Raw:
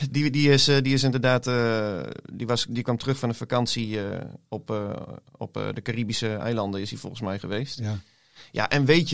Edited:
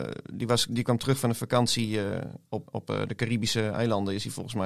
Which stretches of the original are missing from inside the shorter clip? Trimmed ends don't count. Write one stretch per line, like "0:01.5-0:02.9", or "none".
0:04.7-0:05.3